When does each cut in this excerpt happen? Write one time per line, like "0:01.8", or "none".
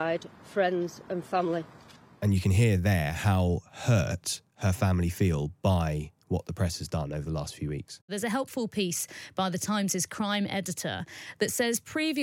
0:04.5